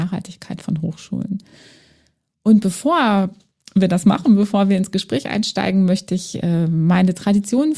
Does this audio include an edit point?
no; 0 cuts

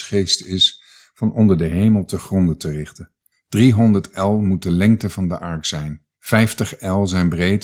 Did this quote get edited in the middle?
yes; 2 cuts; at 3.3 s, 6.1 s

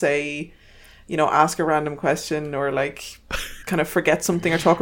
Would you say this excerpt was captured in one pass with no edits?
no; 1 cut; at 3.6 s

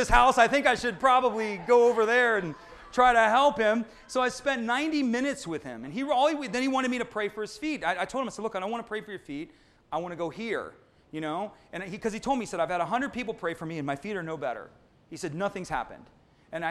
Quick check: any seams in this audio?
no; 0 cuts

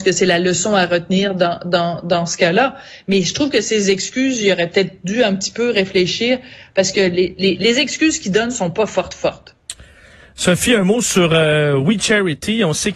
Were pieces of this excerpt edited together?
no; 0 cuts

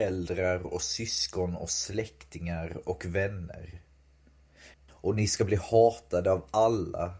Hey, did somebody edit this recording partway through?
yes; 1 cut; at 4.7 s

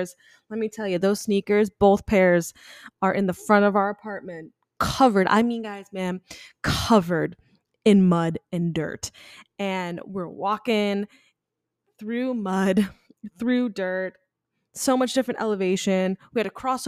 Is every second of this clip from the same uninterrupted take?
yes; 0 cuts

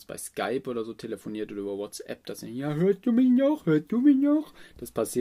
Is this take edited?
no; 0 cuts

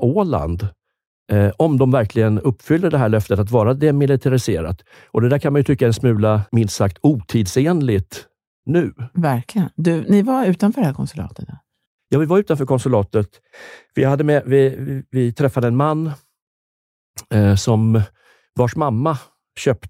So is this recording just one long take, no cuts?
no; 1 cut; at 6.5 s

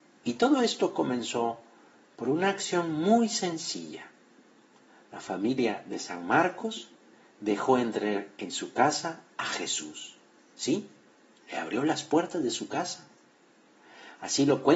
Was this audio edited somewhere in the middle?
no; 0 cuts

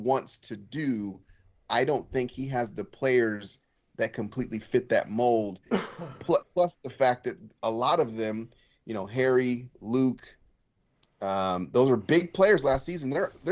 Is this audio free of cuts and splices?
yes; 0 cuts

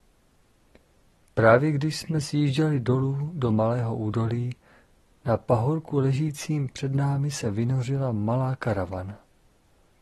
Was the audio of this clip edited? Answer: no; 0 cuts

